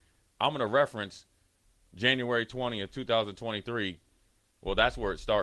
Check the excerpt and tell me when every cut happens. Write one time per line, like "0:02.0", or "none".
none